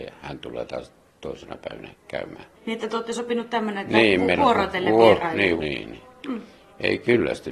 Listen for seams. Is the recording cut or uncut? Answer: cut